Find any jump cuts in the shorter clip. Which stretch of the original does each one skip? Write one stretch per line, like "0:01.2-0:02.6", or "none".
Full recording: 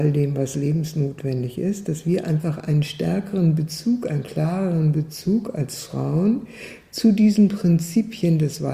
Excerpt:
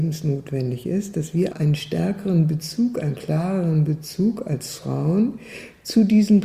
0:02.2-0:02.6